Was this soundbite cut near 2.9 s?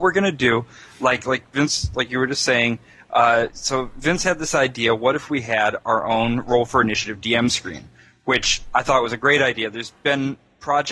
no; 0 cuts

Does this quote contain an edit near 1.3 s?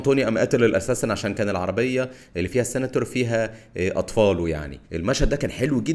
no; 1 cut; at 4.8 s

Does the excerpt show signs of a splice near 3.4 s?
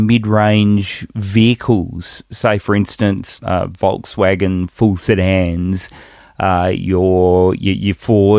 yes; 1 cut; at 3.4 s

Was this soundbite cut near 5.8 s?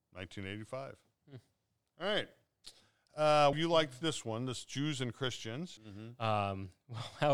yes; 2 cuts; at 3.5 s, 5.8 s

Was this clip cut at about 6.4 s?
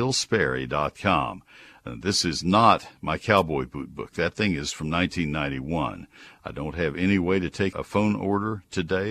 yes; 2 cuts; at 6.4 s, 7.7 s

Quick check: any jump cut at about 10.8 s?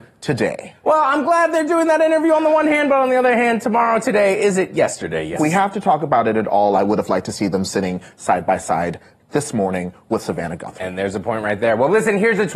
no; 1 cut; at 5.4 s

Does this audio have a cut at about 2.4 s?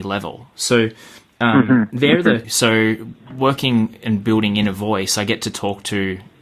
yes; 1 cut; at 2.4 s

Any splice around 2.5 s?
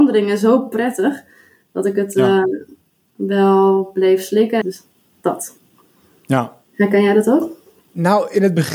no; 1 cut; at 4.6 s

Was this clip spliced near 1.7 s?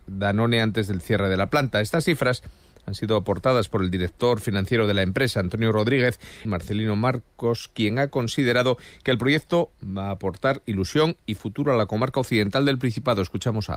no; 1 cut; at 6.4 s

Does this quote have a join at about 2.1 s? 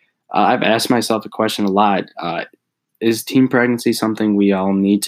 no; 0 cuts

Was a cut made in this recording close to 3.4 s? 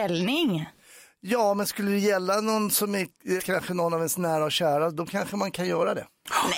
yes; 1 cut; at 3.4 s

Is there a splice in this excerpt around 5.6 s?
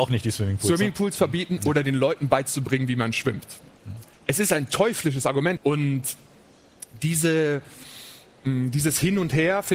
yes; 2 cuts; at 4.1 s, 5.6 s

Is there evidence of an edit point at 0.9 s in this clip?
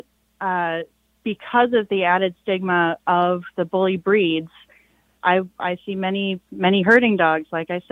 no; 1 cut; at 5.2 s

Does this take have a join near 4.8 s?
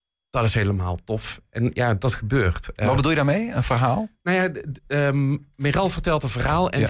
no; 0 cuts

